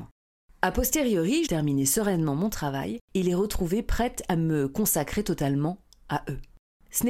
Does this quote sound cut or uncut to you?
cut